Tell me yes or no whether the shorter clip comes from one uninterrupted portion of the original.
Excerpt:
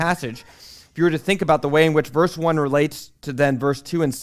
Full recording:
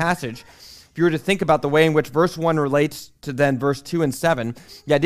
yes